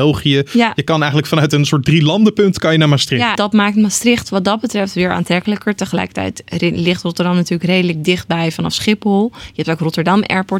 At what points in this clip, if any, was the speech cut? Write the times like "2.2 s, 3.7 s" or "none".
3.4 s